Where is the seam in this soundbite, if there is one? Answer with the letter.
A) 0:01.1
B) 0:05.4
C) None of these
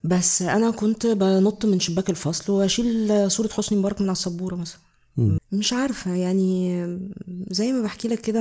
B